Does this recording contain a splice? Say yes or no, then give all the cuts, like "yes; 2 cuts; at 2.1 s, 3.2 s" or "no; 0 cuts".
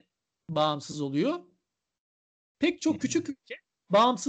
yes; 1 cut; at 2.5 s